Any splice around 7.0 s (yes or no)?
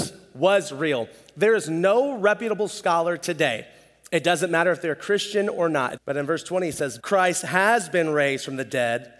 yes